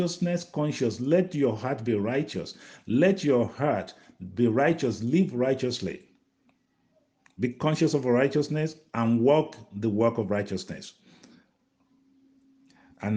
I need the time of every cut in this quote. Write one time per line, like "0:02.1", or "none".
none